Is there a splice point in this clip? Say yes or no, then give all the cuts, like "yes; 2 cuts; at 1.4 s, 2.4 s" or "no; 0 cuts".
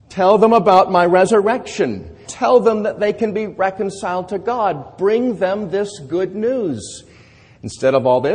yes; 1 cut; at 2.2 s